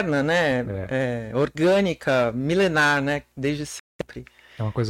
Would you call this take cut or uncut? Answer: uncut